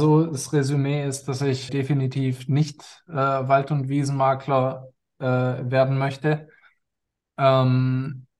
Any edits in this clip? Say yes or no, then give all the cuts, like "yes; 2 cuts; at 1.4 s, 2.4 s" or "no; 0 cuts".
yes; 1 cut; at 1.7 s